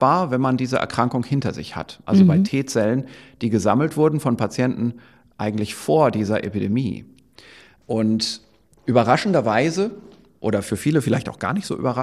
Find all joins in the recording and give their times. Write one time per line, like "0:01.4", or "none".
0:02.0